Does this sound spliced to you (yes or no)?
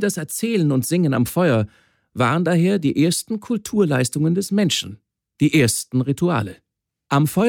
no